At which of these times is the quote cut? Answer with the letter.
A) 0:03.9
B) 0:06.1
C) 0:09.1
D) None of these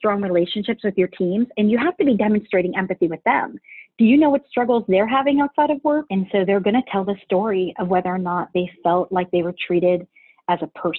B